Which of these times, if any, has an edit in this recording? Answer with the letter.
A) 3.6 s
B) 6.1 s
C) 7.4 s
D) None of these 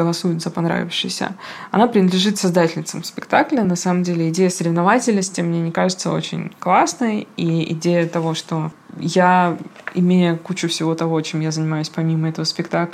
D